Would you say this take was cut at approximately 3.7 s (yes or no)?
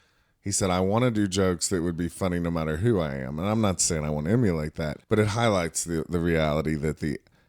no